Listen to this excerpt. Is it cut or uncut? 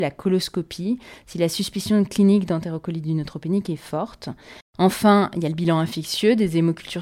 cut